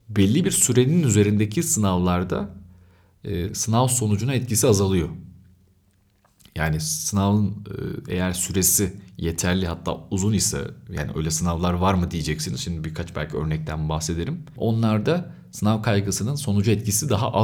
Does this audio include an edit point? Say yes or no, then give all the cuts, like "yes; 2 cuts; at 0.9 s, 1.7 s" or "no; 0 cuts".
yes; 1 cut; at 3.5 s